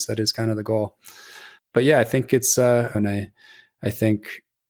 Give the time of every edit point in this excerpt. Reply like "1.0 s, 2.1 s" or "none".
2.9 s

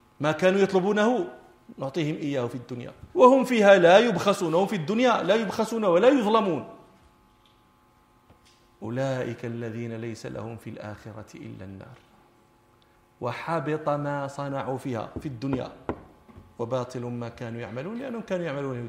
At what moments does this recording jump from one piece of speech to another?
3.1 s

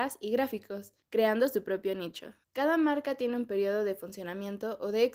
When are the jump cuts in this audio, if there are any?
1.0 s, 2.4 s

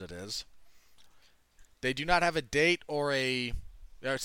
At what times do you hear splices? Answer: 1.6 s

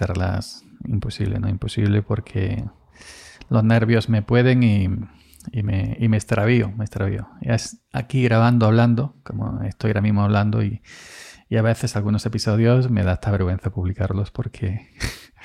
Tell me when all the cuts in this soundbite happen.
none

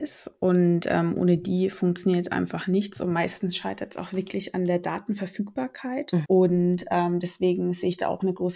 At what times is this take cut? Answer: 6.2 s

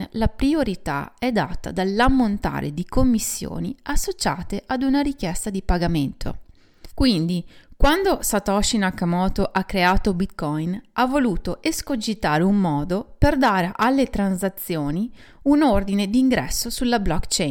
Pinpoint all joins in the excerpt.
6.9 s

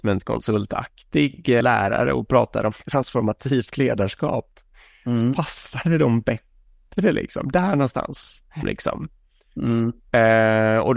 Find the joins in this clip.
1.6 s, 8.6 s

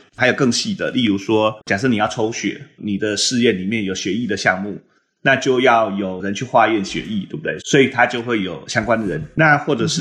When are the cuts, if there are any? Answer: 1.6 s, 7.6 s

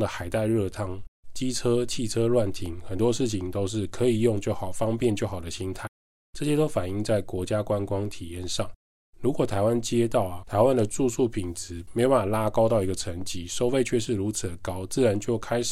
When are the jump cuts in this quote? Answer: none

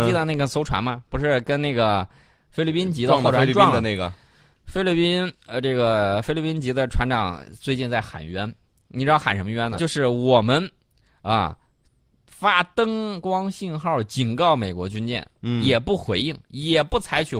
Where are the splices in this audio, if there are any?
9.8 s, 15.4 s

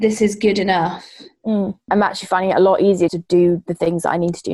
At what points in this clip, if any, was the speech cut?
1.9 s, 3.1 s

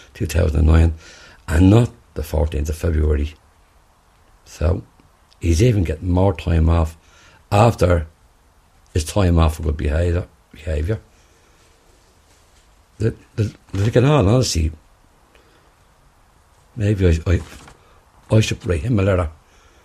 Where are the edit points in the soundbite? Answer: 17.2 s, 18.6 s

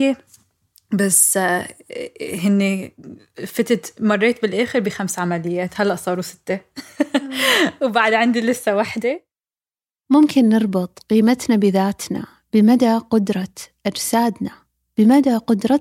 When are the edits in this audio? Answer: none

